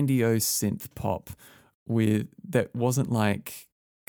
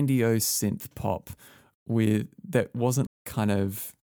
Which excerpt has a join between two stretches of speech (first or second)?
second